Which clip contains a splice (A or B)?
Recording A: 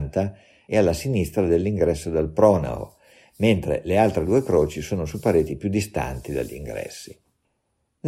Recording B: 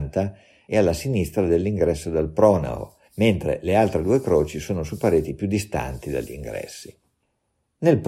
B